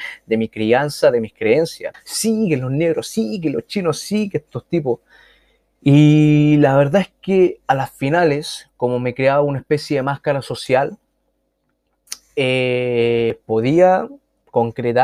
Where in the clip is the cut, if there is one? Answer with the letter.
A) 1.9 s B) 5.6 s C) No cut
A